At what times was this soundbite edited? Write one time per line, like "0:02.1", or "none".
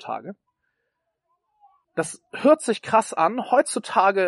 0:01.8

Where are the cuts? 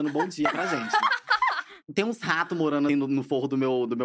0:01.8
0:02.9

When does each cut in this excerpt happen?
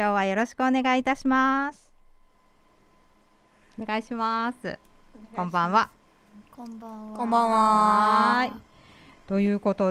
none

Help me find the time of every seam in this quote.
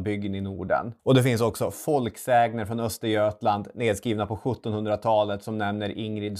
0:01.0

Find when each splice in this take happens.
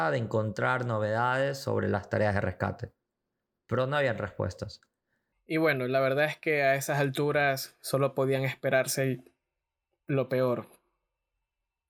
0:05.3

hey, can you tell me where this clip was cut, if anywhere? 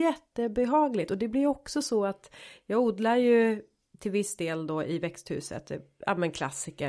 none

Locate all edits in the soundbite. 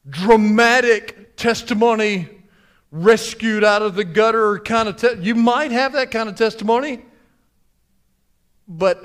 none

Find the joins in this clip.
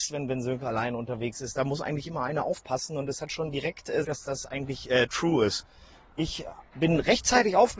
0:04.0

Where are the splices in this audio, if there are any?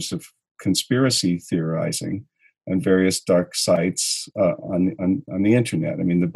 0:05.3

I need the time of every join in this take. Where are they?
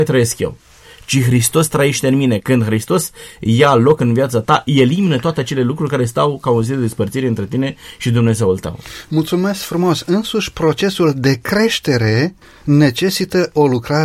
none

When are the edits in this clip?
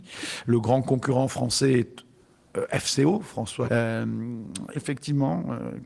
0:03.7
0:04.7

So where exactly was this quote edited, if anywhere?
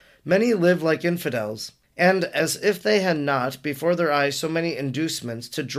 none

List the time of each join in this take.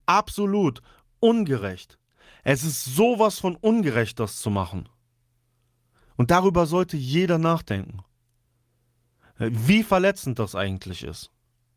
none

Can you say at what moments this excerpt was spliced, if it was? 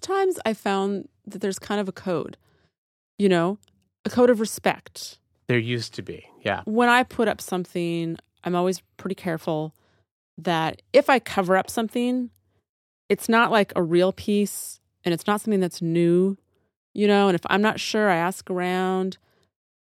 0:06.6

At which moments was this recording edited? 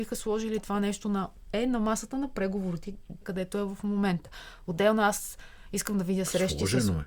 0:03.2

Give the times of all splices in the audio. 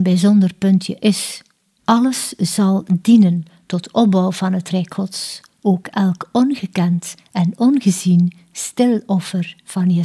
0:01.8

